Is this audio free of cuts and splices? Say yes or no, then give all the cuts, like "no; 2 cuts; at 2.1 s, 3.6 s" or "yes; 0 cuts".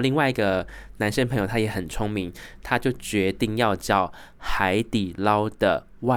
yes; 0 cuts